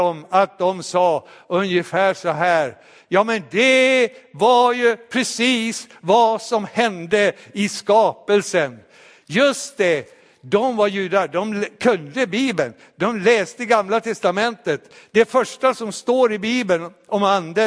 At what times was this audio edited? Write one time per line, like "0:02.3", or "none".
none